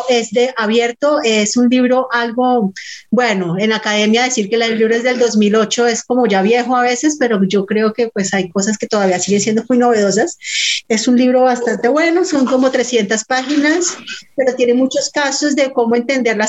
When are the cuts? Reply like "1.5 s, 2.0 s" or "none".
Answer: 10.8 s